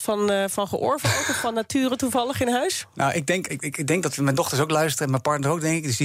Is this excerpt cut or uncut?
cut